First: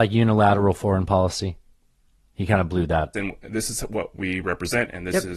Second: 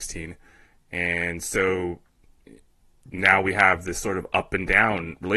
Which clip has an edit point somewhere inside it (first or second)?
first